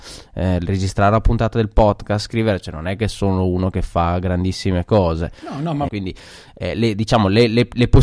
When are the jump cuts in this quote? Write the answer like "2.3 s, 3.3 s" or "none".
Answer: 5.9 s